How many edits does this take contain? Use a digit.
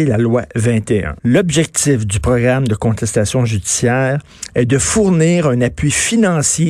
1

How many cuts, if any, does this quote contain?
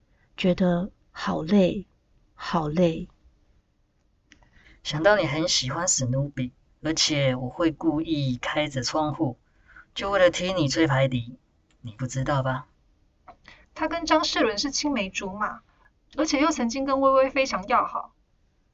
2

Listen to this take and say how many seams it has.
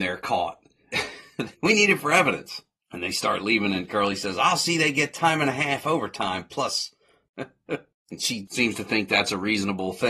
1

